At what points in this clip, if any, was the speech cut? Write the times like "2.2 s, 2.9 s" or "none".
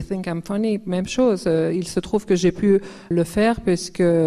3.1 s